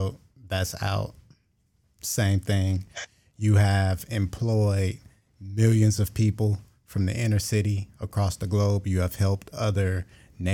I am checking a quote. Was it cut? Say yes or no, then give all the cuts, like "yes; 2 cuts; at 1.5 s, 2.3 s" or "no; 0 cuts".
no; 0 cuts